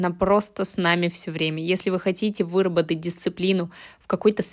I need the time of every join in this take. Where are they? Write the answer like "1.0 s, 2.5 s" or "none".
none